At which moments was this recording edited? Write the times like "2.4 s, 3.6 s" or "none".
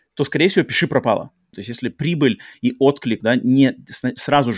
1.5 s, 3.2 s